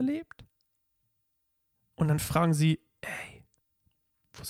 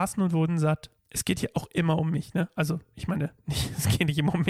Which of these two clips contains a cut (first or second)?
second